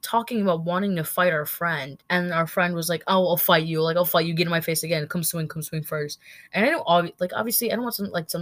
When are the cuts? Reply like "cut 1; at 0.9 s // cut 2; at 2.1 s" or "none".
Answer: cut 1; at 2.0 s